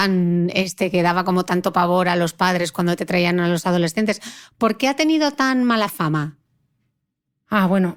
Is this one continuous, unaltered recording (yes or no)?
yes